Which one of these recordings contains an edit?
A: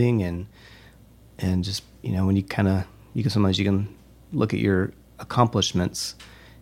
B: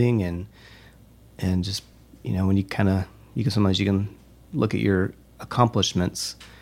A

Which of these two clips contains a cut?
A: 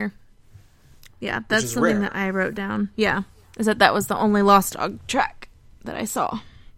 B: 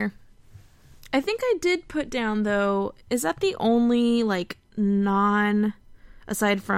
A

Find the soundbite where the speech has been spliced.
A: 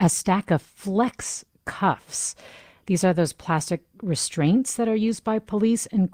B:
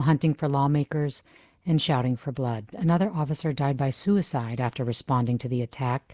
B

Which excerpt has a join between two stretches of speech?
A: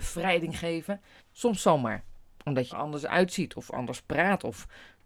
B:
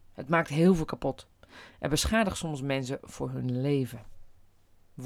A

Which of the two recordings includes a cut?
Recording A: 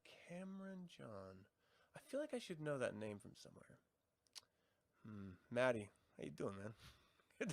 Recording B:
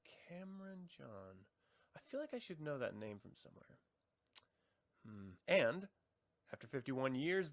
B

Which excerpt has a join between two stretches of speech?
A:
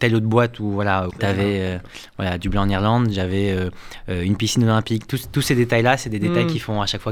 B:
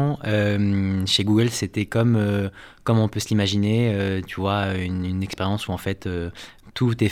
A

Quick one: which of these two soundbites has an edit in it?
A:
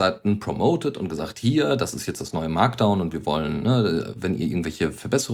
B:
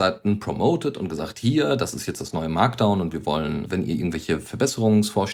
B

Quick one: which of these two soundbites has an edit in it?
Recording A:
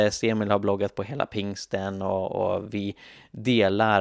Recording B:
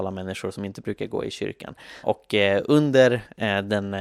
B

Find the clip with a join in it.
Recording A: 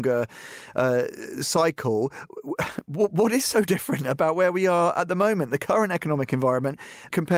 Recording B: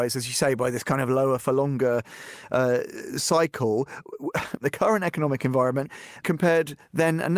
B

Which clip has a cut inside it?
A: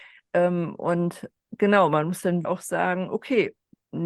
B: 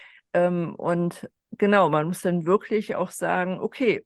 A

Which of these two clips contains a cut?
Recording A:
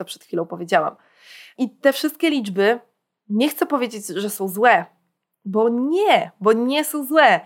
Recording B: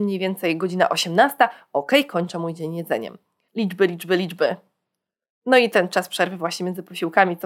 B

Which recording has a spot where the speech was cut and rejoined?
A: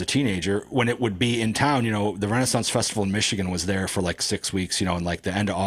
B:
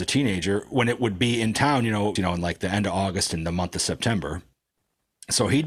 B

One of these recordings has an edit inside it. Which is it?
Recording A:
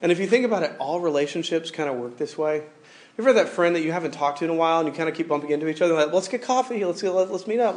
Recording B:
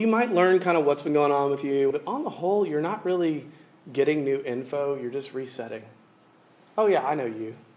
B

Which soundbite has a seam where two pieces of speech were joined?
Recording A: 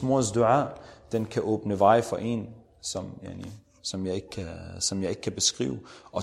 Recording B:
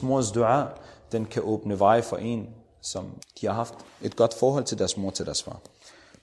B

